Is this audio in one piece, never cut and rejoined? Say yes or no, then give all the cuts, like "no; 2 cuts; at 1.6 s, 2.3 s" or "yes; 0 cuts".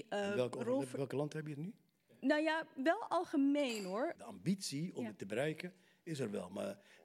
no; 1 cut; at 4.1 s